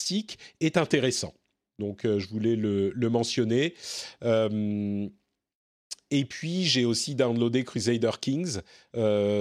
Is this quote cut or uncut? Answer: uncut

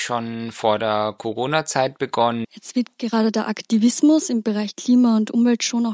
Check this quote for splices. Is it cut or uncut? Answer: cut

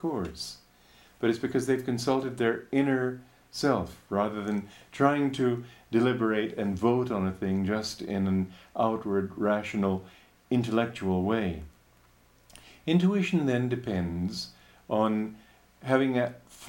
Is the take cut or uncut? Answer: uncut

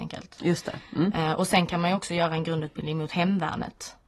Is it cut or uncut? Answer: uncut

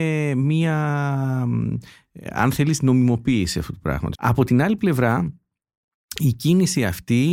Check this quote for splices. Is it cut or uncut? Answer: cut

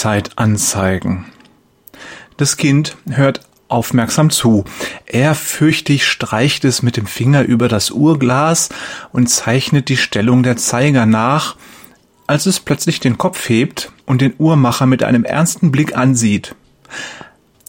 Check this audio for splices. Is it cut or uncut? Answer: cut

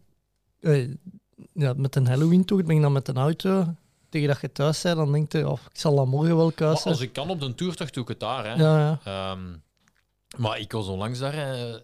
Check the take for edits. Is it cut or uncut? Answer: uncut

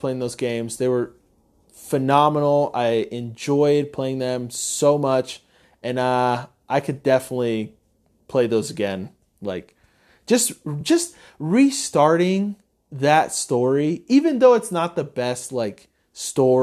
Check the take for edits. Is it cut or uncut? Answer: uncut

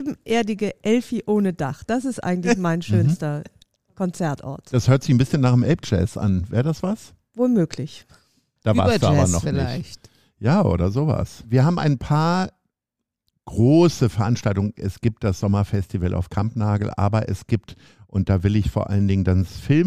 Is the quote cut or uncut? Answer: uncut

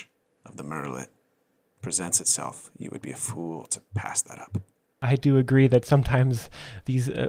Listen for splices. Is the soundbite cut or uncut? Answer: uncut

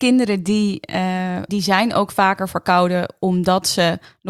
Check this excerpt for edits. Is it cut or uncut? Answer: cut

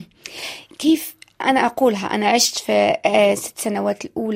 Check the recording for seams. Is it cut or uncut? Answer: cut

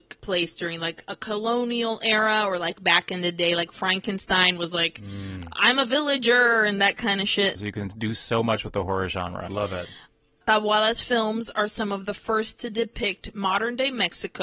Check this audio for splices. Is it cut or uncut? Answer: cut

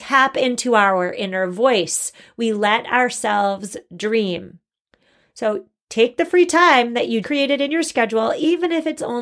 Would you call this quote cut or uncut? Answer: cut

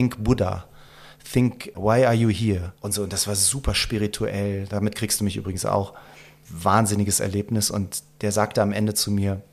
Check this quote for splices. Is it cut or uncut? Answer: cut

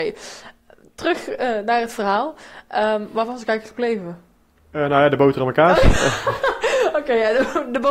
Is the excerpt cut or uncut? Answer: uncut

